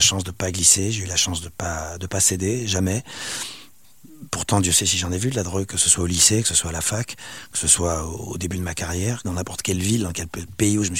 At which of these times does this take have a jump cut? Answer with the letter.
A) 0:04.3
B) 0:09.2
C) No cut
B